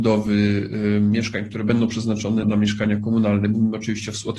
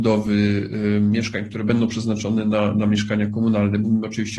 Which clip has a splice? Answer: first; 1 cut; at 2.4 s

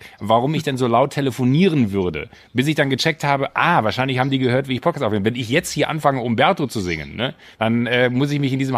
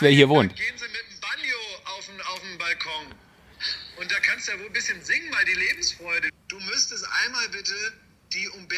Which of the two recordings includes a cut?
second; 1 cut; at 6.3 s

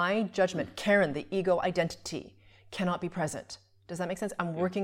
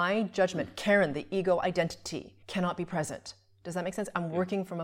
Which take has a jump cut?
second; 1 cut; at 2.4 s

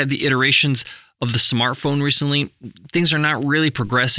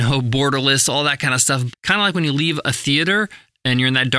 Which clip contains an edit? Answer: second; 1 cut; at 1.7 s

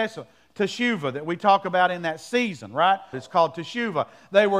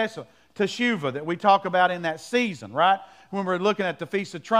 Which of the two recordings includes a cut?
first; 1 cut; at 3.1 s

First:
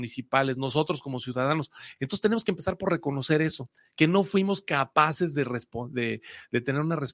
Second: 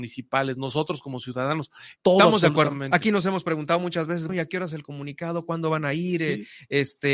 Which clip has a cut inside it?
second; 2 cuts; at 2.0 s, 4.3 s

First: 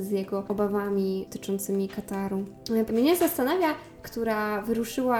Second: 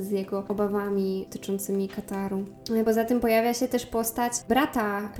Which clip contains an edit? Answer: first; 2 cuts; at 2.9 s, 4.0 s

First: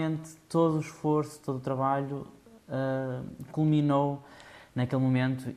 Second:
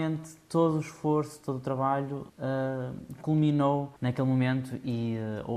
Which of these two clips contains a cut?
second; 2 cuts; at 2.3 s, 4.0 s

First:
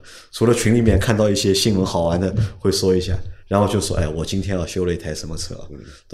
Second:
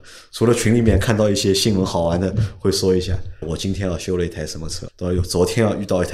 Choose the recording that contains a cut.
second; 2 cuts; at 3.4 s, 4.9 s

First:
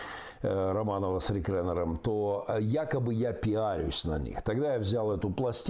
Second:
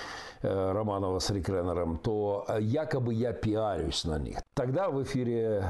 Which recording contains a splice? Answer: second; 1 cut; at 4.4 s

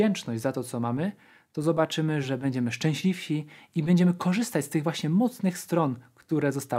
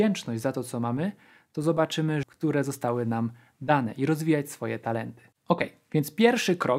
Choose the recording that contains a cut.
second; 1 cut; at 2.2 s

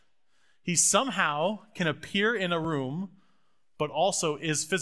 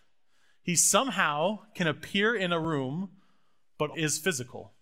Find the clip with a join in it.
second; 1 cut; at 3.9 s

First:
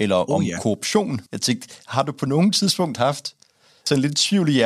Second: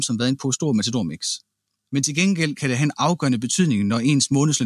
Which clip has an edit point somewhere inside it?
first; 1 cut; at 1.3 s

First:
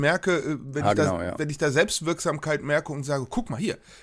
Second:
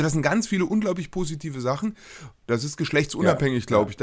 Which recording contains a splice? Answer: second; 1 cut; at 2.4 s

